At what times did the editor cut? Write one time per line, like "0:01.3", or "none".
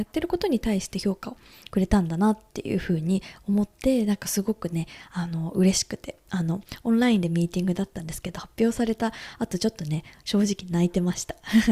none